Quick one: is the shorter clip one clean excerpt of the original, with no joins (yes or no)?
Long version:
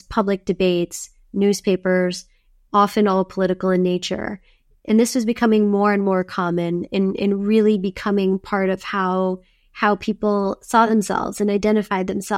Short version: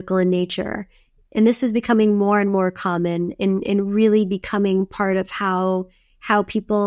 yes